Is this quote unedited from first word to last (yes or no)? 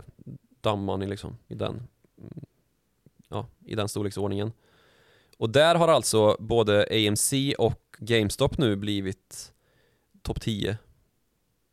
no